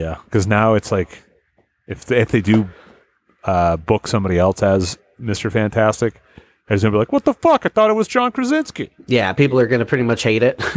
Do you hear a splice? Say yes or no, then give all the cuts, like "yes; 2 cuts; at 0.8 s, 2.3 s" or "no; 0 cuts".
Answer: no; 0 cuts